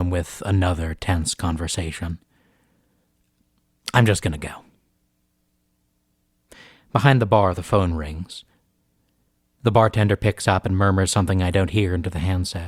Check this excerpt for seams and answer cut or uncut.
uncut